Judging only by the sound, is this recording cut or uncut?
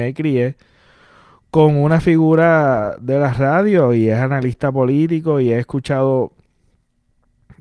uncut